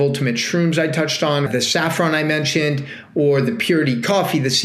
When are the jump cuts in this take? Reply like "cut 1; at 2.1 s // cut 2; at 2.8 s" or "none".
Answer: cut 1; at 1.5 s